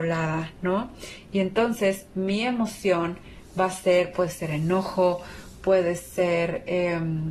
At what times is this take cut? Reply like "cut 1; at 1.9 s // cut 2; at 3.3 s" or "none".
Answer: cut 1; at 4.1 s